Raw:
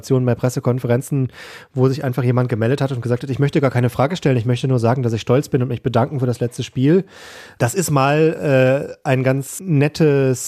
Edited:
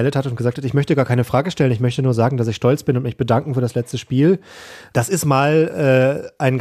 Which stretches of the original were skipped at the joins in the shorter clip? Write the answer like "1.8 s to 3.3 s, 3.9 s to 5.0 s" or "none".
none